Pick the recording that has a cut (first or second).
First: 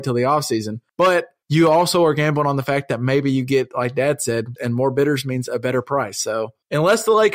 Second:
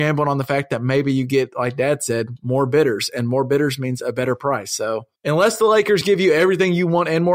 first